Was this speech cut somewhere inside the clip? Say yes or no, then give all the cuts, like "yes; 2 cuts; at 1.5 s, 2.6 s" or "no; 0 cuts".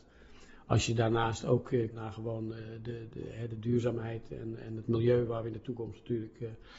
yes; 1 cut; at 1.9 s